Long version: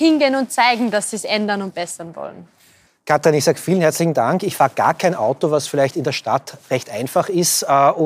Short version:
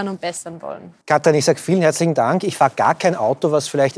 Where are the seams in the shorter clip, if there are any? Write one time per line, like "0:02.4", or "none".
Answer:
0:01.0